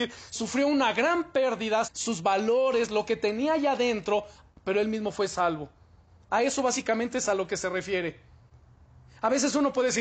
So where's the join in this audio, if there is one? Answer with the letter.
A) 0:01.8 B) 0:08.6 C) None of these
A